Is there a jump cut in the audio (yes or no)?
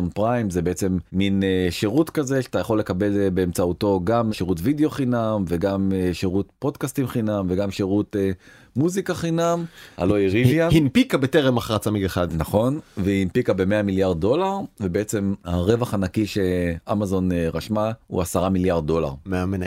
yes